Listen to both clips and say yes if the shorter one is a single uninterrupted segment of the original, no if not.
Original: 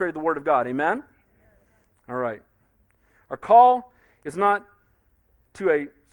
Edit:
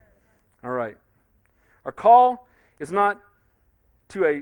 yes